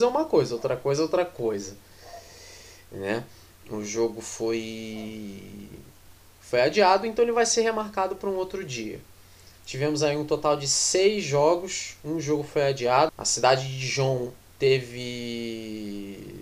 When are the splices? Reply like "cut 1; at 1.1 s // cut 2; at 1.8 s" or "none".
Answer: cut 1; at 9.5 s // cut 2; at 13.1 s